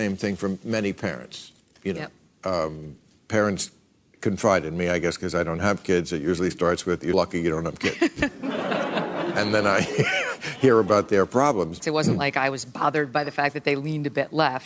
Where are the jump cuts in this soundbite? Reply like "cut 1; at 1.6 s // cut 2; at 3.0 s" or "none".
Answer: cut 1; at 7.1 s // cut 2; at 11.8 s